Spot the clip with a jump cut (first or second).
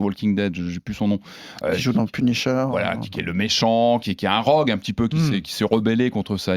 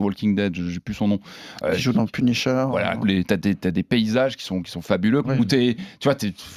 second